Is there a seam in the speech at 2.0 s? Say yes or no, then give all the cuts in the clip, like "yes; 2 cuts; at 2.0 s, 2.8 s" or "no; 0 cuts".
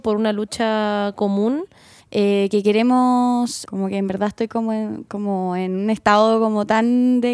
yes; 2 cuts; at 2.0 s, 3.6 s